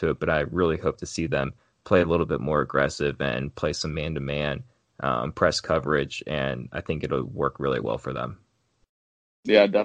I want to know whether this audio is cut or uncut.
uncut